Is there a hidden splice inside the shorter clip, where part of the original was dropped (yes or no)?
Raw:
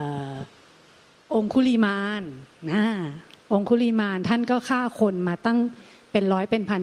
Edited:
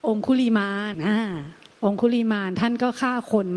yes